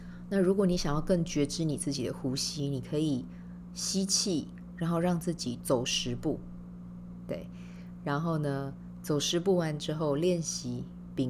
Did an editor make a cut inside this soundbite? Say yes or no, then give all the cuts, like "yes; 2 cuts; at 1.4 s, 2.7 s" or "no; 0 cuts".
yes; 1 cut; at 5.6 s